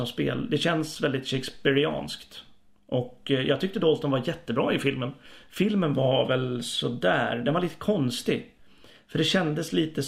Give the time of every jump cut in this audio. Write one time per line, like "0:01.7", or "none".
none